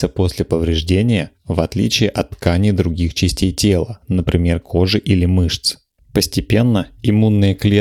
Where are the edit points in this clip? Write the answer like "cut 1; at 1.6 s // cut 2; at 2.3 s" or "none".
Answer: cut 1; at 6.0 s